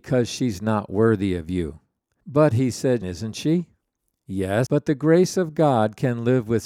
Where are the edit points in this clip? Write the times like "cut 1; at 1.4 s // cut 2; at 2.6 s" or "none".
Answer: cut 1; at 3.0 s // cut 2; at 4.7 s